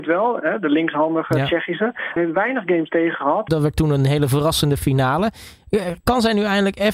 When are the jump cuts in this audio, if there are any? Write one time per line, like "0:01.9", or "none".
0:02.2
0:03.5